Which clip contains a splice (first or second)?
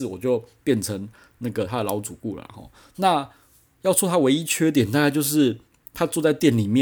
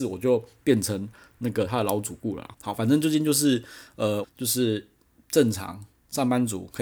second